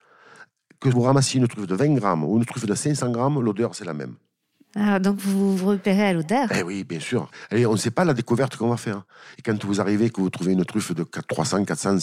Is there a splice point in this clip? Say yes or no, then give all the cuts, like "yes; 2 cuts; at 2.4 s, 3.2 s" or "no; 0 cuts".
no; 0 cuts